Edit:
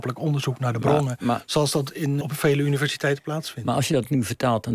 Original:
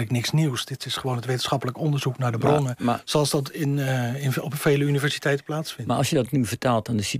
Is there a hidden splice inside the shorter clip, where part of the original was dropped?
yes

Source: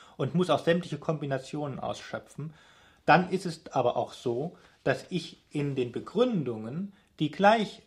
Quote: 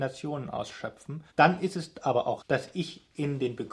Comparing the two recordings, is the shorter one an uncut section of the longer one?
no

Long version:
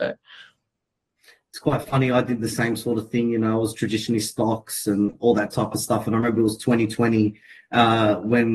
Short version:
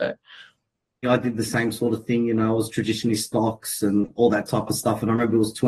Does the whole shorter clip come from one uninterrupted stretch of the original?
no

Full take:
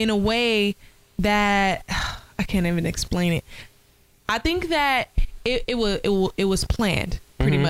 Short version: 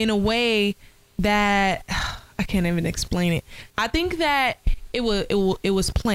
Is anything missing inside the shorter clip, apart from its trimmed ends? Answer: yes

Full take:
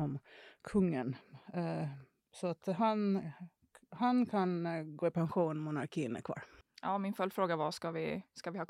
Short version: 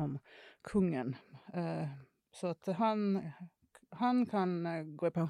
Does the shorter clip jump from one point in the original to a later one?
no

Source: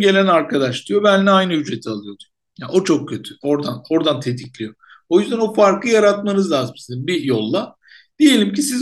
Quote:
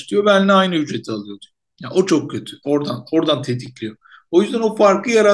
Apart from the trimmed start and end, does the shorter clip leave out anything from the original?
no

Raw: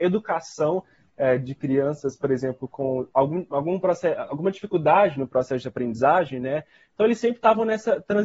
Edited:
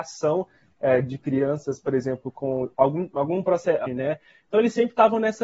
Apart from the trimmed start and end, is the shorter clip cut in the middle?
yes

